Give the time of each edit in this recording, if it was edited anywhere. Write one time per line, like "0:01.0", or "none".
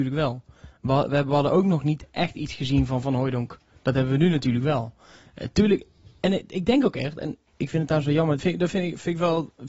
0:08.4